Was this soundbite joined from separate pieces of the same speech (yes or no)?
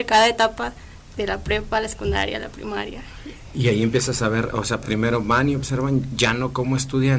no